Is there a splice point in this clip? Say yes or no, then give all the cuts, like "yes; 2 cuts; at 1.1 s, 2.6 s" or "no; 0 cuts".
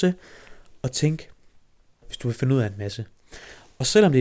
yes; 1 cut; at 2.0 s